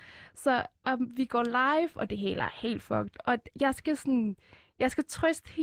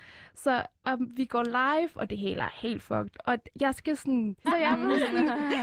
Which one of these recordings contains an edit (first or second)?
second